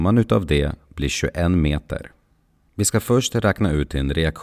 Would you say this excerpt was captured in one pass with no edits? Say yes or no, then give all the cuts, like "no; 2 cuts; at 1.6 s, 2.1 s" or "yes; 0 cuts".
no; 1 cut; at 2.7 s